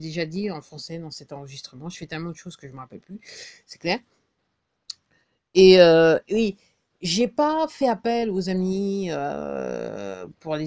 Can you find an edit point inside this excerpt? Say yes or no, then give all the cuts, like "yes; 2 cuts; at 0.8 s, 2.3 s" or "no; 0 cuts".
no; 0 cuts